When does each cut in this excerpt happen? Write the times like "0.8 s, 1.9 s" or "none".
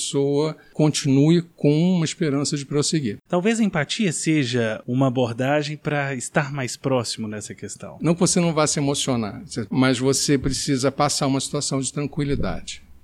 3.3 s, 8.0 s, 9.7 s